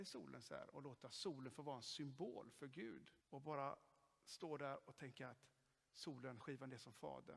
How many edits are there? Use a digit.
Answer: 1